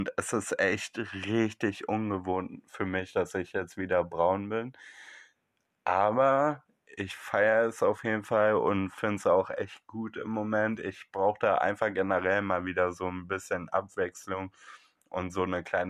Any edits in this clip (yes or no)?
no